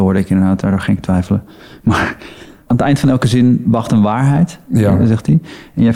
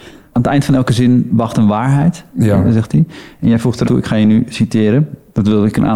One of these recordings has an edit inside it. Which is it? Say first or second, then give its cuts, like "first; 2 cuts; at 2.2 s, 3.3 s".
second; 1 cut; at 3.8 s